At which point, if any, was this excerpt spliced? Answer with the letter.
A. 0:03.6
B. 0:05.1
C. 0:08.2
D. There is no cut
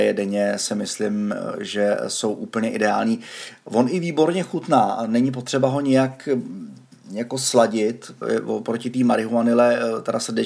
C